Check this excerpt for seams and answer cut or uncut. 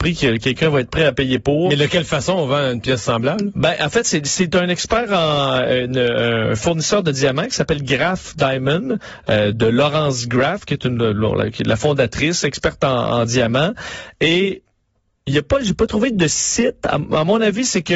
uncut